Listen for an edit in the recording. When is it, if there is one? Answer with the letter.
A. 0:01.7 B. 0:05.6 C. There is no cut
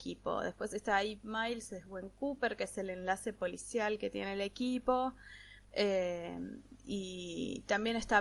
B